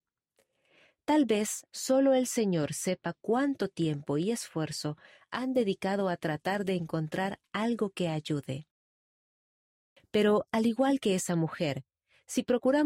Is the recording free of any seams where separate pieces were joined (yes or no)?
no